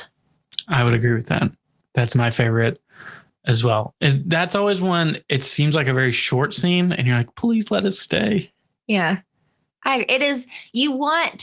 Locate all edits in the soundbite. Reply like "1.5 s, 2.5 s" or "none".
none